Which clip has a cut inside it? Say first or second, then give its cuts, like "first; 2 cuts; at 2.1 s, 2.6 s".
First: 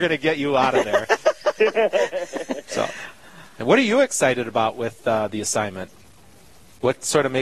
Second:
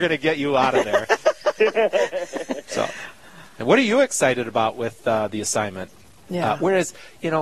second; 1 cut; at 6.3 s